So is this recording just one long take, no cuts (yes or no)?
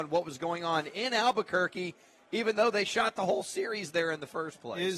yes